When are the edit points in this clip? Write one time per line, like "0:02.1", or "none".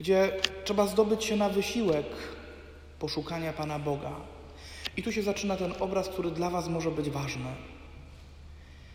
none